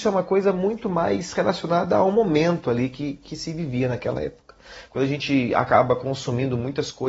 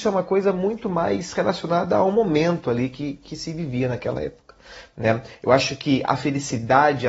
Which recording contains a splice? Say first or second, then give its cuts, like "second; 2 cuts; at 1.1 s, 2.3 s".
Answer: first; 1 cut; at 4.9 s